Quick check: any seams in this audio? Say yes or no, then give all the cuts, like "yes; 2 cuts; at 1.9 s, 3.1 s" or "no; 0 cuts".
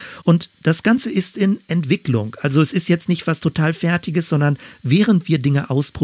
no; 0 cuts